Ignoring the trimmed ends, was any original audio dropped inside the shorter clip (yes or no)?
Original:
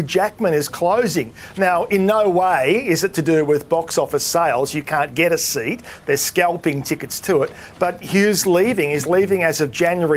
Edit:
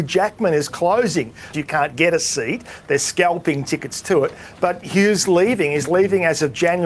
yes